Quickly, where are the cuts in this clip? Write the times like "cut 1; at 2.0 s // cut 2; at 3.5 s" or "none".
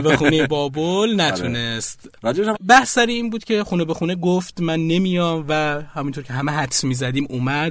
cut 1; at 2.5 s